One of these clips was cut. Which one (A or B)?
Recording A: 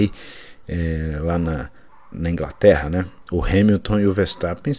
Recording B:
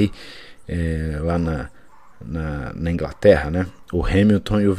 A